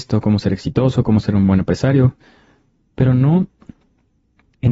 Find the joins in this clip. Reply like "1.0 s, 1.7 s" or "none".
none